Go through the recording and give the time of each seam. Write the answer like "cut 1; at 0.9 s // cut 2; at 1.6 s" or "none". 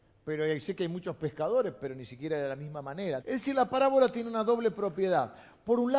cut 1; at 3.2 s